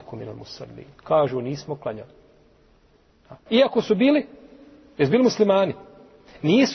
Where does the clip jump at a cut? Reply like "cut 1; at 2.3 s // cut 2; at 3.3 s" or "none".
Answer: cut 1; at 3.5 s